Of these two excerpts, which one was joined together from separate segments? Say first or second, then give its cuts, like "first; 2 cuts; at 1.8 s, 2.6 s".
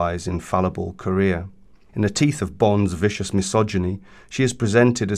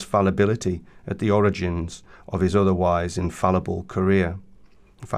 first; 1 cut; at 1.9 s